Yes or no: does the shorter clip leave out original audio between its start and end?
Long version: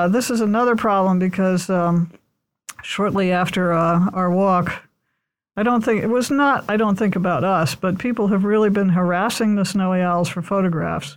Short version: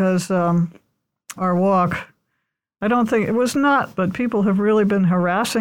yes